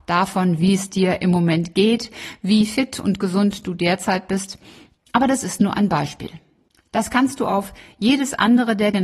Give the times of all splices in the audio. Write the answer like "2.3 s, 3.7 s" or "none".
none